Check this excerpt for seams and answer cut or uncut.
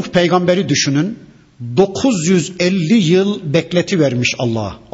uncut